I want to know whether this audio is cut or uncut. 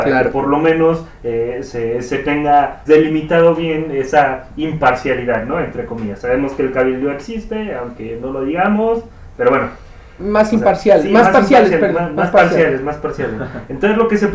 cut